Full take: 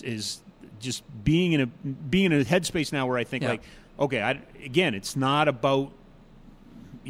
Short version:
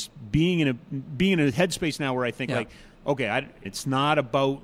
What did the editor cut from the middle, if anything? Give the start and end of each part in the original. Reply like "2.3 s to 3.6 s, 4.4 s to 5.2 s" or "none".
4.6 s to 4.9 s

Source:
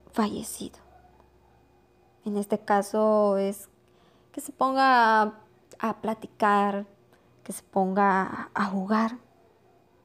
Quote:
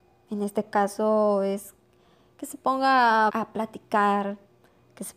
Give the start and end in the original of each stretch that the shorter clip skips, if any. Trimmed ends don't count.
5.2 s to 5.8 s

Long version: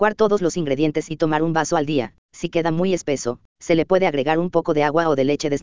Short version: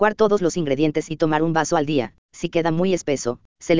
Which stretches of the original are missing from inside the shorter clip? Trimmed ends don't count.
none

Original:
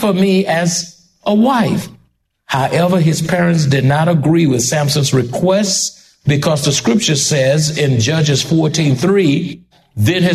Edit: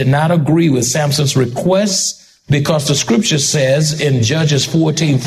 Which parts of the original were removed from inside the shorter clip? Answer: none

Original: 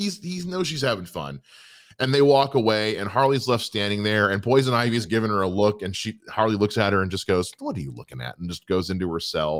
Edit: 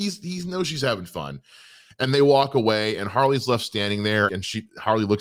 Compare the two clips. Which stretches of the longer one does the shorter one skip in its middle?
4.3 s to 5.8 s

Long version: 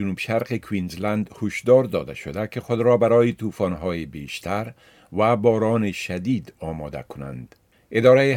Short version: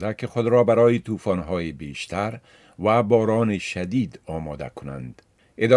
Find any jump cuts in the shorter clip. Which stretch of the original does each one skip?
none

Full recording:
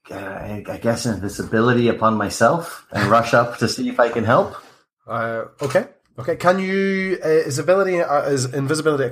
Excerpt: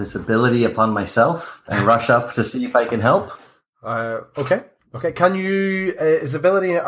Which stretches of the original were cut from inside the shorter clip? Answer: none

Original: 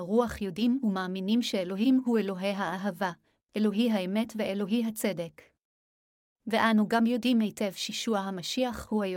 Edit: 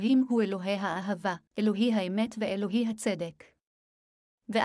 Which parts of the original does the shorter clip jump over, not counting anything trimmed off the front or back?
3.2 s to 3.4 s

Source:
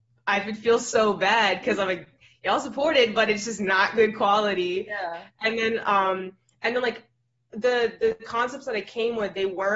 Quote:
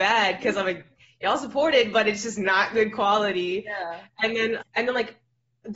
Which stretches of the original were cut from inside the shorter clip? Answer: 5.8 s to 6.5 s

